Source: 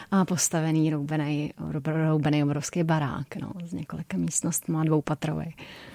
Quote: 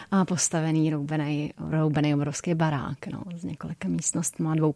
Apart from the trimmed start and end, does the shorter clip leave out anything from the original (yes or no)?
yes